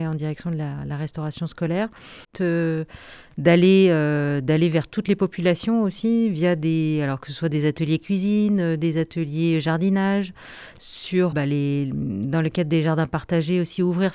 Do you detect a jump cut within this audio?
yes; 2 cuts; at 2.3 s, 11.3 s

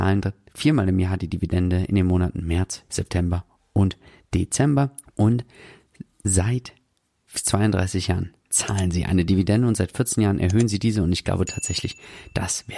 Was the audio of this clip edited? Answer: yes; 2 cuts; at 2.9 s, 5.0 s

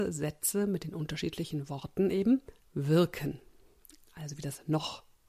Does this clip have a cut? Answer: no; 0 cuts

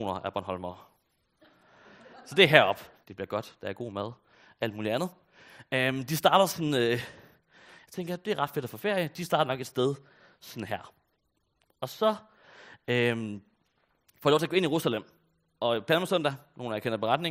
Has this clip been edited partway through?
yes; 1 cut; at 3.0 s

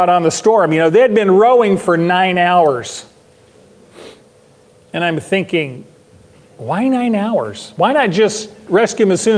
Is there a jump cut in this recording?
no; 0 cuts

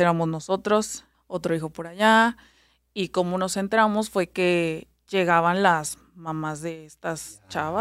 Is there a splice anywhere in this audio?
yes; 1 cut; at 1.1 s

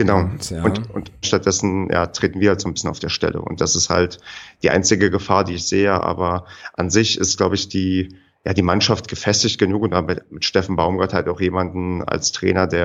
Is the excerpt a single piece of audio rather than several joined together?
no; 1 cut; at 1.2 s

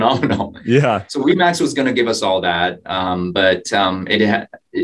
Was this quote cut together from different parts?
no; 0 cuts

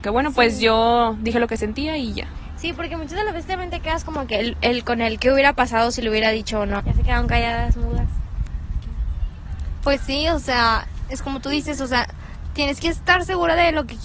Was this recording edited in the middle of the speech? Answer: yes; 1 cut; at 6.8 s

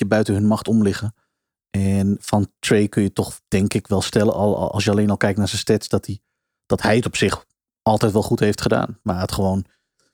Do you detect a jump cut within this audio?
no; 0 cuts

